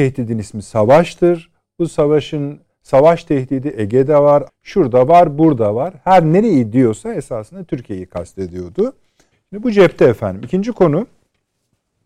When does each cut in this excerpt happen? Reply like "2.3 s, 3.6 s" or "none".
4.5 s, 9.3 s